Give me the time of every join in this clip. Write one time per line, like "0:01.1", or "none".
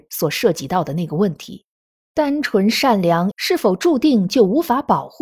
0:01.9
0:03.3